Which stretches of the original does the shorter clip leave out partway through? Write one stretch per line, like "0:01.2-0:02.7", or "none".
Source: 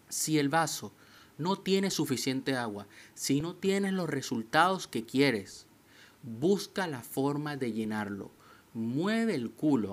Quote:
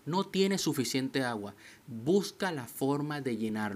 0:03.1-0:06.2